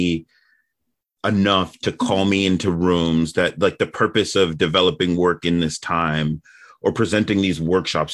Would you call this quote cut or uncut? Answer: uncut